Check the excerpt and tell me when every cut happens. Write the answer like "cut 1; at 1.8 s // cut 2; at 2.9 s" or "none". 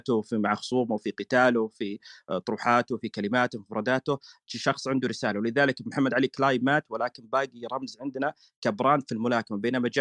none